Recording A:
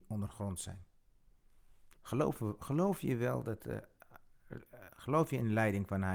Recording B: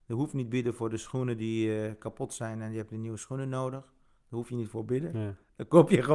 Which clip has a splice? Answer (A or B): A